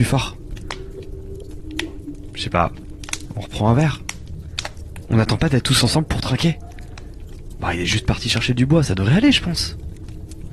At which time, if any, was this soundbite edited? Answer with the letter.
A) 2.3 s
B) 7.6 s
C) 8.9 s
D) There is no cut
D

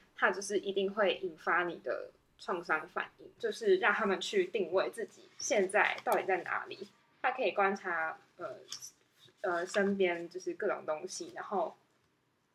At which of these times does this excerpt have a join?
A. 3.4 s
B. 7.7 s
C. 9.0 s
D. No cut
A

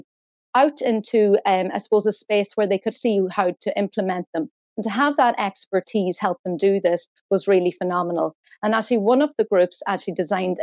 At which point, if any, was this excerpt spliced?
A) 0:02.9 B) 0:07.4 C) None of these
A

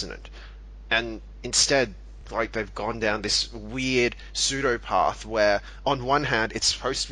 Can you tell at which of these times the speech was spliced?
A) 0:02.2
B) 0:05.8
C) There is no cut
C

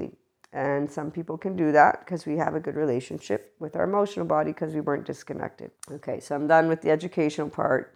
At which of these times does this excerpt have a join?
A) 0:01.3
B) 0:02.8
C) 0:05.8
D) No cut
C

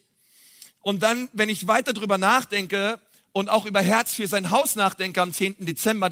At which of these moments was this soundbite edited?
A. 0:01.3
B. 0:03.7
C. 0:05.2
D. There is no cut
D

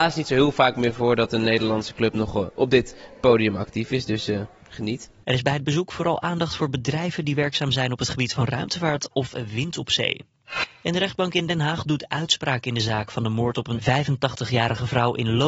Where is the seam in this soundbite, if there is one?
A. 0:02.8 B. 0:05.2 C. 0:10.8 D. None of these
B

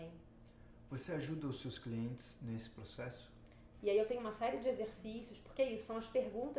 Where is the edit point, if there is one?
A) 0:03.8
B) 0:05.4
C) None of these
A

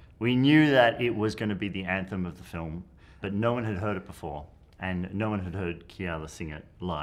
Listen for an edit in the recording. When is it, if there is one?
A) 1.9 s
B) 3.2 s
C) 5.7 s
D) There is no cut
B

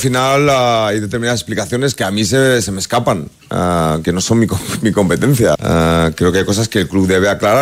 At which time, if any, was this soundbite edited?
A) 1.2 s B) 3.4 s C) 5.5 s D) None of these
C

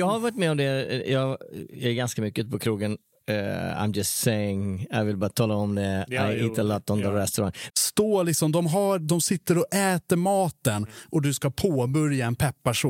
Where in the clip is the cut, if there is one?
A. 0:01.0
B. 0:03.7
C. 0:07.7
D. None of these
C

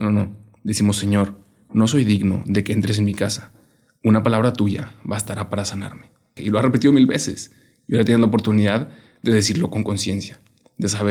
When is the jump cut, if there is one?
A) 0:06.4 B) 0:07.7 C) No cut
A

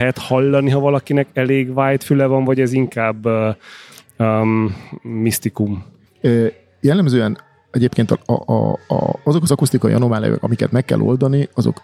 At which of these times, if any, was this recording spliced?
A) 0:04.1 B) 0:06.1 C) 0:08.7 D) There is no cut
B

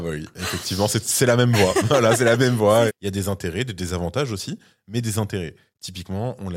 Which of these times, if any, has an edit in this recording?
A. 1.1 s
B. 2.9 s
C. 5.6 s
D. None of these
B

